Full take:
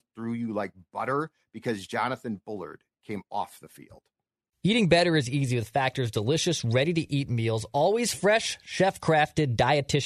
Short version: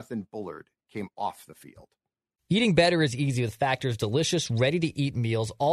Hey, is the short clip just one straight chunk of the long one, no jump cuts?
yes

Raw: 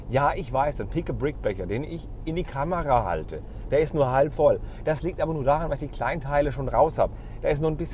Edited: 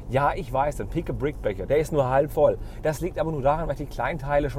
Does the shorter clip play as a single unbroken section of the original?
no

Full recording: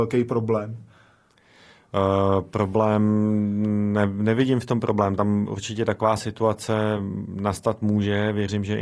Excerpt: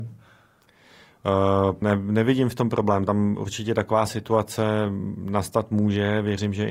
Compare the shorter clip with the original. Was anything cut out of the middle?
yes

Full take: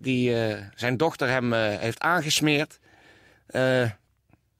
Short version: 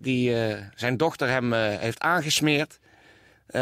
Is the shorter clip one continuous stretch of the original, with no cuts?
yes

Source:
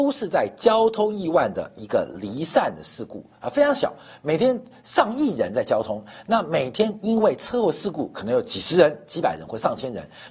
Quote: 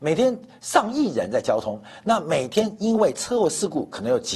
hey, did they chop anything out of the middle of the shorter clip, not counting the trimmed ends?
no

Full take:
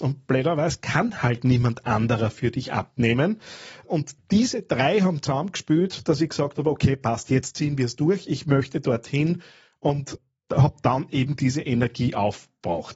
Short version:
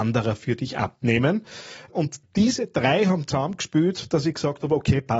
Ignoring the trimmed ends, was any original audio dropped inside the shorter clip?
no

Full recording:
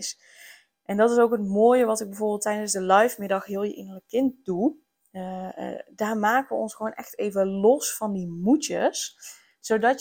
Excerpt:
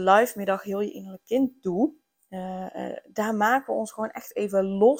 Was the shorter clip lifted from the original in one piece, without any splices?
yes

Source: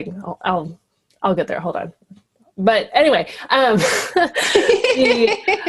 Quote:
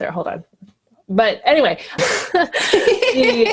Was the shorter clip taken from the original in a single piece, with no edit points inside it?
no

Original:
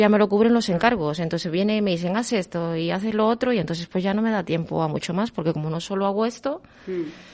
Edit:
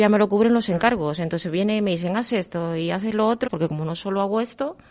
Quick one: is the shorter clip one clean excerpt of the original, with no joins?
no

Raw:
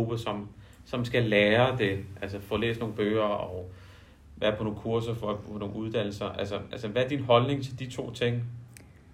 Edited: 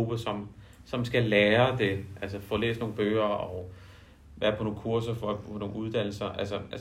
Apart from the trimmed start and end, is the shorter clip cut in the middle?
no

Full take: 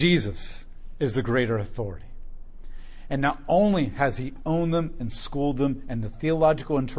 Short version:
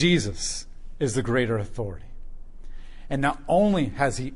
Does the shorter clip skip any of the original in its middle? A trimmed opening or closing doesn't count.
no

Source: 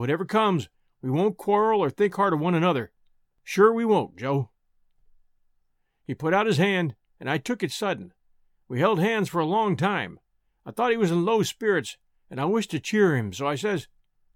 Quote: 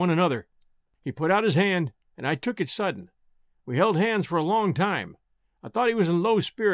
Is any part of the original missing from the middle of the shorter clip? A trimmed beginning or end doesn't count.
yes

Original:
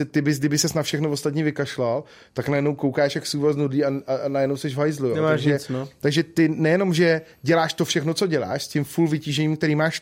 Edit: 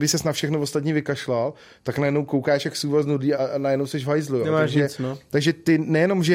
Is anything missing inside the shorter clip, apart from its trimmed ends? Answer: yes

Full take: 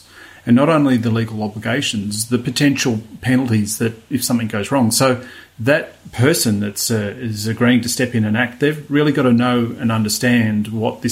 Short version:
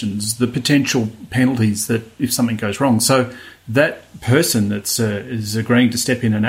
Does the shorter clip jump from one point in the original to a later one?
no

